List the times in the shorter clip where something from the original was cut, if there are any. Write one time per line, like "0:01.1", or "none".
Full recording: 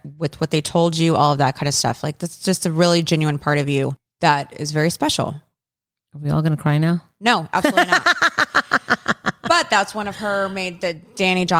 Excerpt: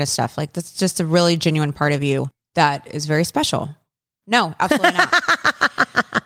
0:04.2